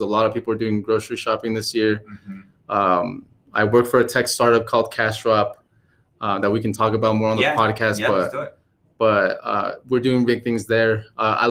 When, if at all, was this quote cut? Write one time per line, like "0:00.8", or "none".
0:10.3

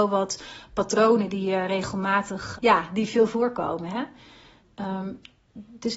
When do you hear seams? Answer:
0:02.6

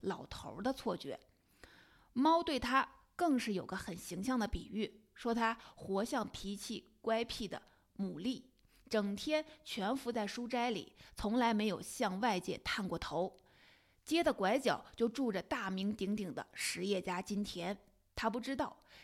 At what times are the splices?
none

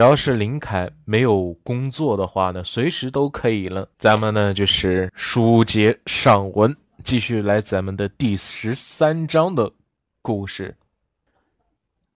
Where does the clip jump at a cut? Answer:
0:03.9

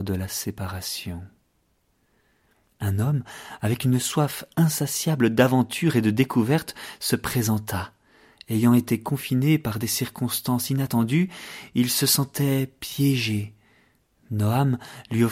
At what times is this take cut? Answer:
none

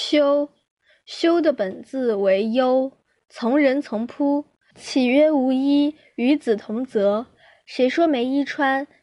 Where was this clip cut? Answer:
0:04.7

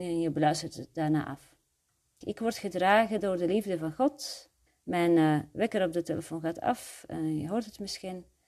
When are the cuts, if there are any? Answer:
0:02.2
0:04.7

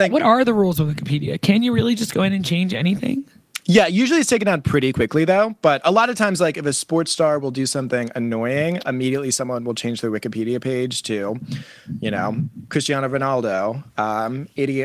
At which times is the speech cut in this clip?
none

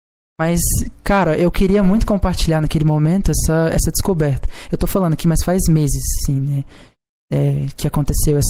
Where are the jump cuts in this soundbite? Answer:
none

